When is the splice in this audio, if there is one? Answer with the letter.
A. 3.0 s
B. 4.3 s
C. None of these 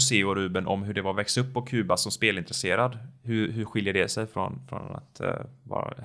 C